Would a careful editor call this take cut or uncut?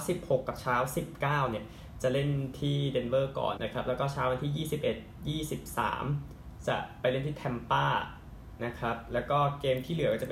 cut